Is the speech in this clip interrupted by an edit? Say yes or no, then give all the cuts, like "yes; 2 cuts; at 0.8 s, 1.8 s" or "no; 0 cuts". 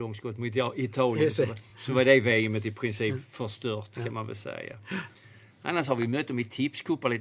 no; 0 cuts